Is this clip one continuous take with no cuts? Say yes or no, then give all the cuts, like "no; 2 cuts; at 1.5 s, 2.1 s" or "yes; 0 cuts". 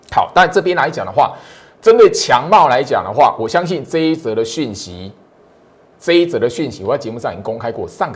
yes; 0 cuts